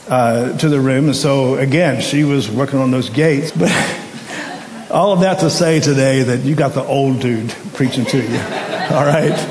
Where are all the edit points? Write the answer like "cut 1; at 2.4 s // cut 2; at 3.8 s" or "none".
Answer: cut 1; at 3.5 s